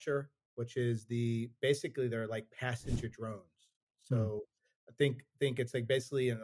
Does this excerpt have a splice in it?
no; 0 cuts

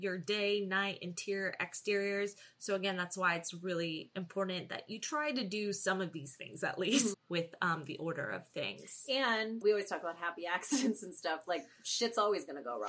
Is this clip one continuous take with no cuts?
no; 2 cuts; at 7.1 s, 9.6 s

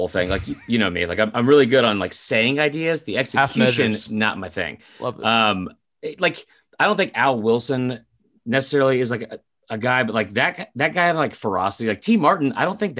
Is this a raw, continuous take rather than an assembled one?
yes; 0 cuts

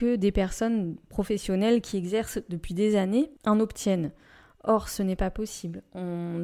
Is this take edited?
no; 0 cuts

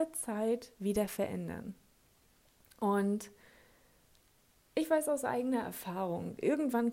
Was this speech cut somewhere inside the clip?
no; 0 cuts

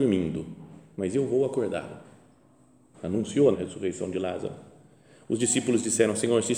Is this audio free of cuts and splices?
no; 1 cut; at 3.5 s

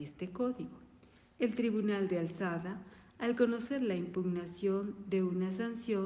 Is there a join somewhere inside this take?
no; 0 cuts

